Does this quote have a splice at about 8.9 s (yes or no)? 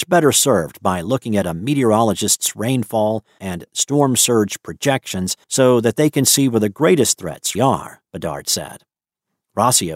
no